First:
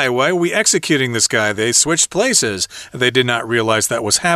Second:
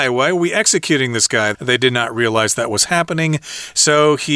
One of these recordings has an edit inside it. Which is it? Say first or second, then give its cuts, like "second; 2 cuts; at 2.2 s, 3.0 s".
second; 1 cut; at 1.5 s